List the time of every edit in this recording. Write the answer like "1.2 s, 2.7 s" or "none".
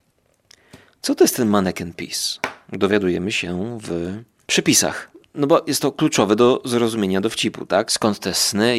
7.9 s